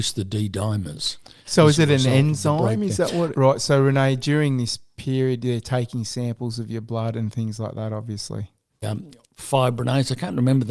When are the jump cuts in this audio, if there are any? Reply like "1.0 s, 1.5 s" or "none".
3.3 s, 8.8 s